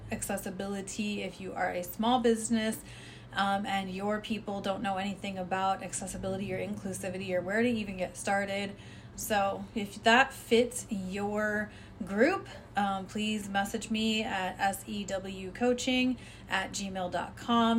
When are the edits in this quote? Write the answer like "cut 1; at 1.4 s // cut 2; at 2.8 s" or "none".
cut 1; at 9.1 s